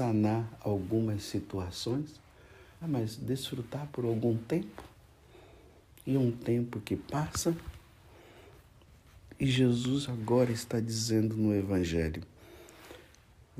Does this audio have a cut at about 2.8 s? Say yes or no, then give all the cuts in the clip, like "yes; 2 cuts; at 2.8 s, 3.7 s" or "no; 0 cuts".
yes; 1 cut; at 2.8 s